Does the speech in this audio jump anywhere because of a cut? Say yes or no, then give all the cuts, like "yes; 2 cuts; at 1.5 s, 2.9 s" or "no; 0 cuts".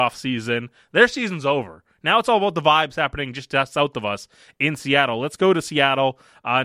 no; 0 cuts